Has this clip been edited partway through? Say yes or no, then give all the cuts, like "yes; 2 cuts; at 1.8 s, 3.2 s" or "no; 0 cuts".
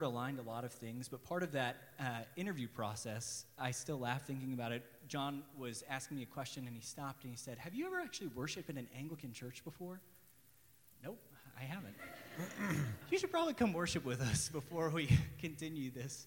no; 0 cuts